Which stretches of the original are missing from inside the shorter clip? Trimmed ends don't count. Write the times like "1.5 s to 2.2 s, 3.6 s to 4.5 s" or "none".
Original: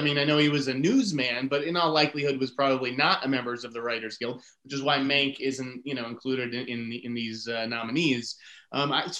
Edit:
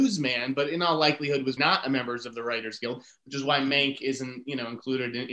2.5 s to 3.0 s